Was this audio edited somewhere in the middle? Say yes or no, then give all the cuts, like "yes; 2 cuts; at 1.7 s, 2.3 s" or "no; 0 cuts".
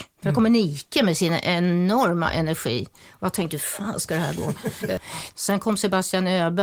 yes; 1 cut; at 5.3 s